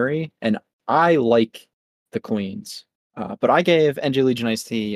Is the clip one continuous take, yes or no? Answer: no